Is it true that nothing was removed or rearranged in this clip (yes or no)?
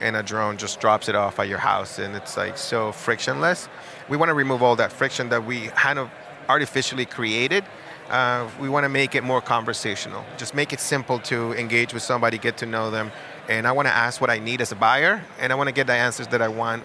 yes